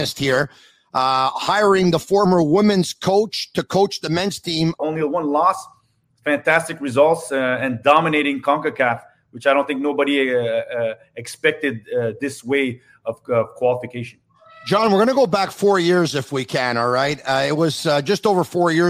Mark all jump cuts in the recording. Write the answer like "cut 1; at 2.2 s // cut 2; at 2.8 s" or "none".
cut 1; at 4.8 s